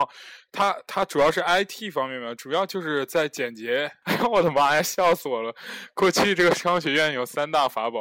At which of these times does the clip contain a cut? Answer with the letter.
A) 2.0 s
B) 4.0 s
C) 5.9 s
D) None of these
B